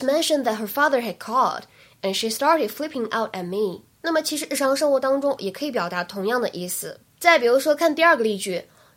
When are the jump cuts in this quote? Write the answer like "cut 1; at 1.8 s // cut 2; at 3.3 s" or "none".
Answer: cut 1; at 3.9 s // cut 2; at 5.4 s // cut 3; at 7.0 s